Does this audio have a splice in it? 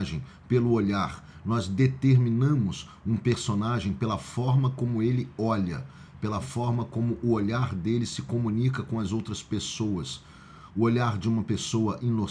no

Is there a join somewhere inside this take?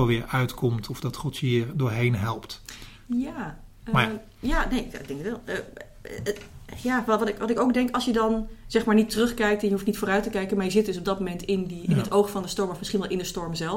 no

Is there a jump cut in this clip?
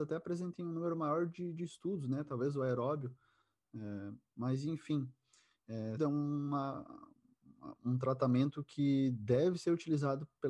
yes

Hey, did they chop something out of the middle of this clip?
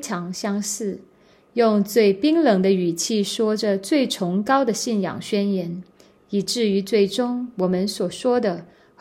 no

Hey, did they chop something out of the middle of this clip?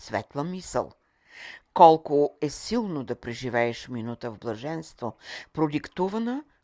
no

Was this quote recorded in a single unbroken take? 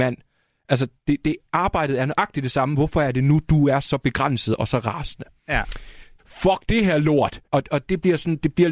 no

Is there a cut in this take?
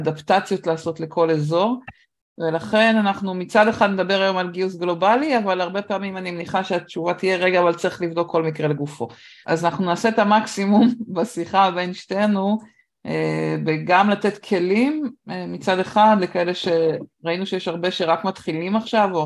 yes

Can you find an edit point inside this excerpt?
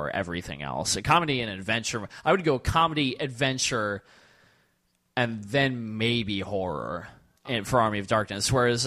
no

